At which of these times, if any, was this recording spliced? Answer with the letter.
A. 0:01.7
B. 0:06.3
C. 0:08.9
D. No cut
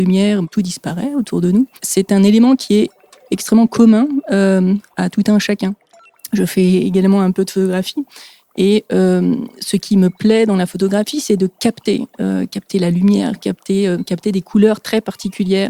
D